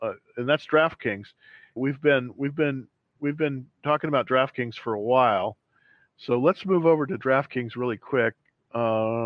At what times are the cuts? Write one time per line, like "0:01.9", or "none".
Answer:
0:01.8